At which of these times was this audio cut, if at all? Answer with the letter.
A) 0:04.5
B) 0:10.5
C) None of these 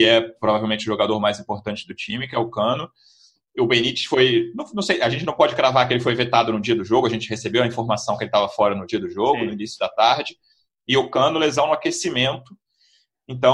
C